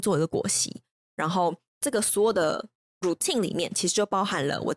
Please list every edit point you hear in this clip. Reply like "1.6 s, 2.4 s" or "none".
none